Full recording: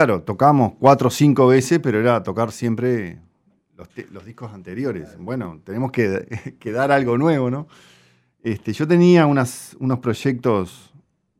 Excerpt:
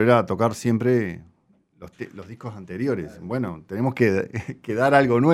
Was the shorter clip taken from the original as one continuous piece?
yes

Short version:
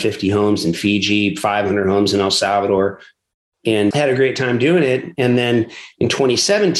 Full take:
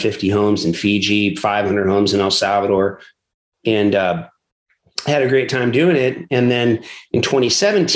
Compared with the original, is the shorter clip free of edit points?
no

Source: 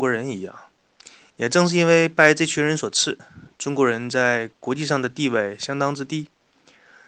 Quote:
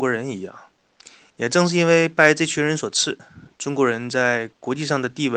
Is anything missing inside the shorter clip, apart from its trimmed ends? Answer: no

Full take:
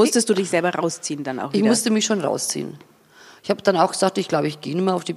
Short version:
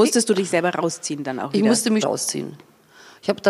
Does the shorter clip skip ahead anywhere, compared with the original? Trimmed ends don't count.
yes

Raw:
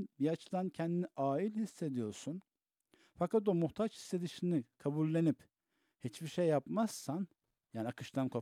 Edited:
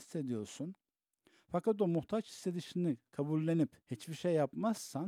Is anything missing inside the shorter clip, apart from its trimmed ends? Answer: yes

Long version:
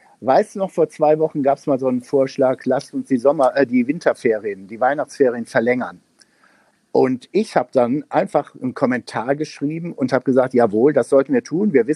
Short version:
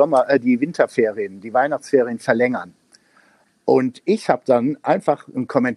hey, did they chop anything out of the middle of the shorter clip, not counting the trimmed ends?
no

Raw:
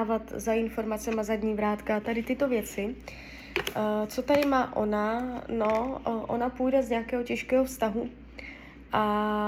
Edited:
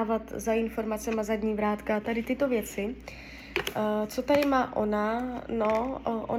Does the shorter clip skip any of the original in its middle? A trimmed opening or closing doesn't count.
no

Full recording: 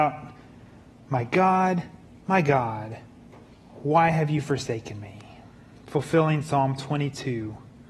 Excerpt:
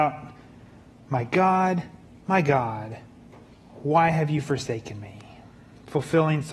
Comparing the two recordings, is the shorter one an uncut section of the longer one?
yes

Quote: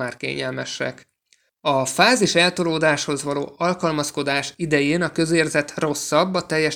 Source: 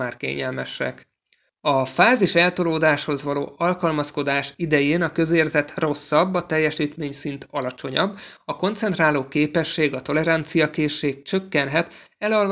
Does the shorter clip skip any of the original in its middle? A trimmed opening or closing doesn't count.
no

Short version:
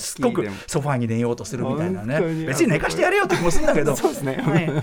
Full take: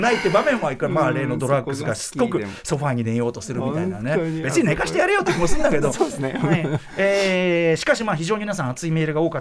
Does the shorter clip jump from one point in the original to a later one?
no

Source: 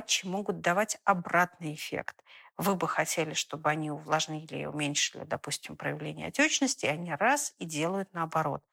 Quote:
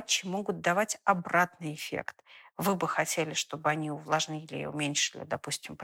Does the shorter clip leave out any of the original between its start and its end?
no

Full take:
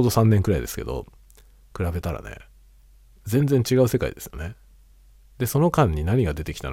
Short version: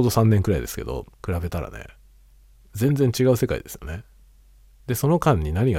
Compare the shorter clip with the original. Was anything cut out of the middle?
yes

